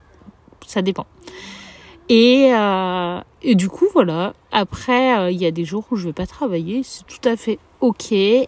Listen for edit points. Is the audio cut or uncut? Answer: uncut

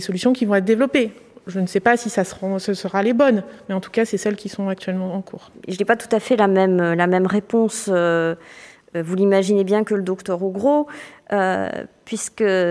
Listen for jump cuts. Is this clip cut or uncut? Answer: uncut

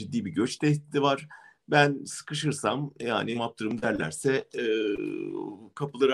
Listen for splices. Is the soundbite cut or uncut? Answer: cut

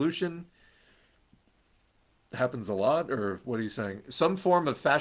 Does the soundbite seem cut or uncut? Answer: uncut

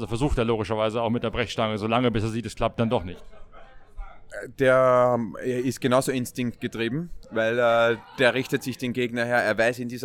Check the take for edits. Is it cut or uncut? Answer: uncut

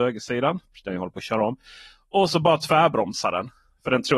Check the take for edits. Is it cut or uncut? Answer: uncut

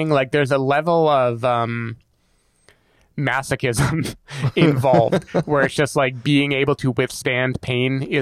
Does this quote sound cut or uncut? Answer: uncut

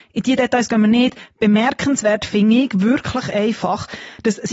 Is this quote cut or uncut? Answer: uncut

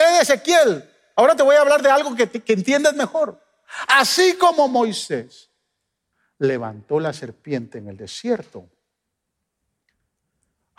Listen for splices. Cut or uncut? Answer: uncut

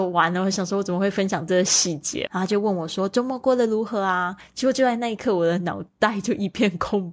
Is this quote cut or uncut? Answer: cut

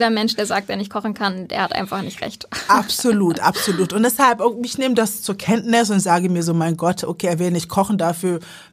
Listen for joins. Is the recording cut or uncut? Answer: uncut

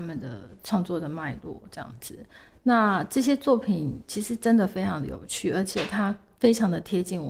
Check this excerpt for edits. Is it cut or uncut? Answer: uncut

